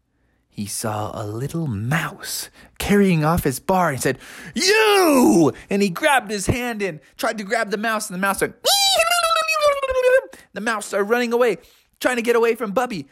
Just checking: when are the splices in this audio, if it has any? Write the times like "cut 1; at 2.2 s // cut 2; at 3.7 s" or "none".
none